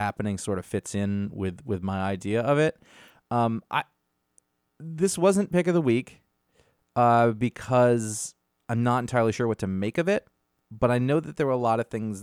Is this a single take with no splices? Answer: yes; 0 cuts

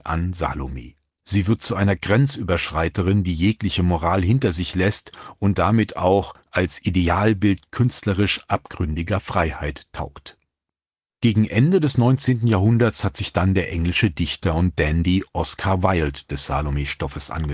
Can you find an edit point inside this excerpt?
yes; 1 cut; at 6.5 s

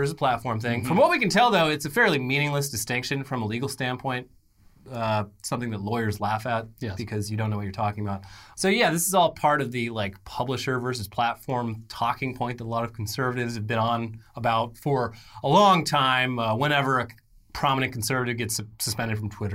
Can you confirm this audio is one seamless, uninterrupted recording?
no; 1 cut; at 8.5 s

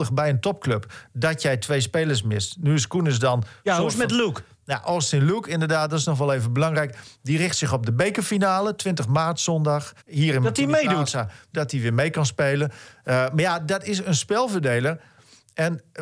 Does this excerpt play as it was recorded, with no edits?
no; 2 cuts; at 10.0 s, 11.5 s

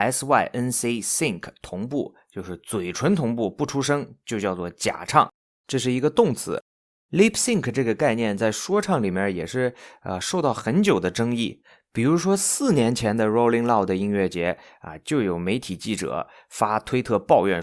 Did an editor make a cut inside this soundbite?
no; 0 cuts

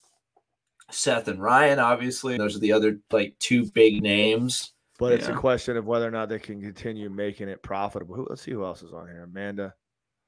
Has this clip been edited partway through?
yes; 2 cuts; at 2.4 s, 5.0 s

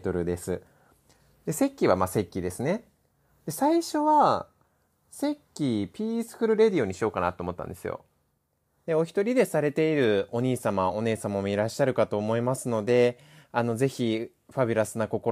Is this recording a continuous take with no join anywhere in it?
no; 1 cut; at 8.9 s

